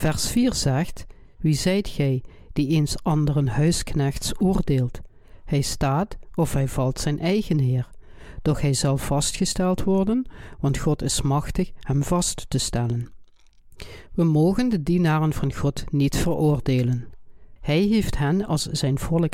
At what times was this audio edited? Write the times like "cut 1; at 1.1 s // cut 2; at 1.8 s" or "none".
cut 1; at 14.1 s // cut 2; at 17.6 s